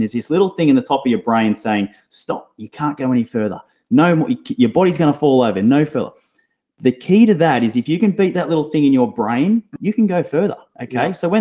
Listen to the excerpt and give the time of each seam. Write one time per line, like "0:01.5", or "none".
0:09.8